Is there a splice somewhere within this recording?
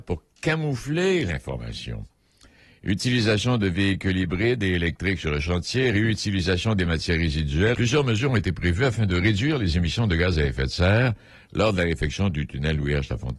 yes; 1 cut; at 7.7 s

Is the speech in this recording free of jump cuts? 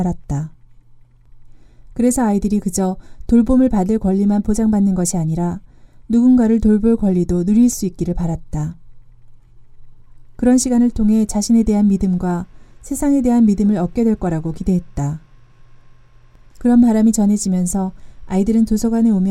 yes; 0 cuts

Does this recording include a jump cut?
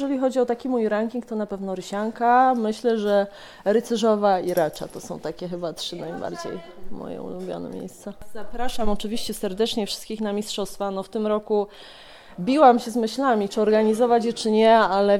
no; 0 cuts

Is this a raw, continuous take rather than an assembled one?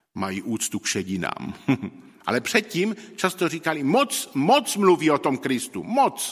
no; 1 cut; at 4.3 s

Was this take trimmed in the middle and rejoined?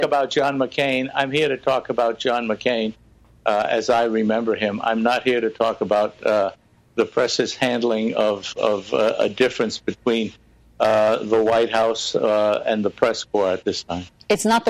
no; 0 cuts

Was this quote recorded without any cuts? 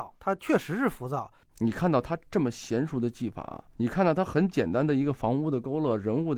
no; 1 cut; at 1.5 s

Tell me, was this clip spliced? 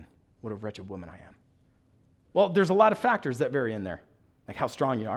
yes; 1 cut; at 2.2 s

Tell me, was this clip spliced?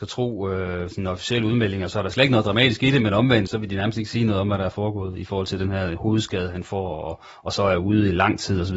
yes; 1 cut; at 3.5 s

